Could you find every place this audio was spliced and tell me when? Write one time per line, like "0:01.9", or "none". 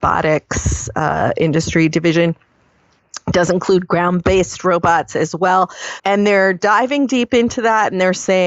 0:06.0